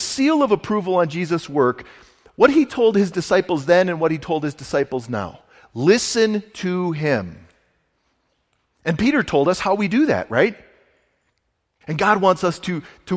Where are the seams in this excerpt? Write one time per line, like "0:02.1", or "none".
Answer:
0:11.8